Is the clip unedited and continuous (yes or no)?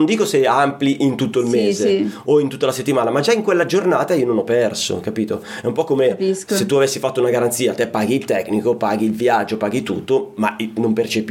yes